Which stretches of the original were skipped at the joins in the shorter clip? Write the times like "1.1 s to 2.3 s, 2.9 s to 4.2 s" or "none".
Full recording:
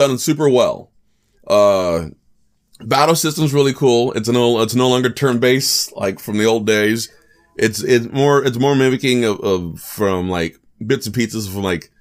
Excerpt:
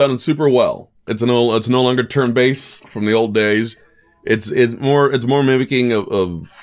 1.1 s to 4.1 s, 5.9 s to 6.2 s